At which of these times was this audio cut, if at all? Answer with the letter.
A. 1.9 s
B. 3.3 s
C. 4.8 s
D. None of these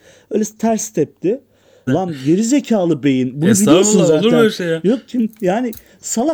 A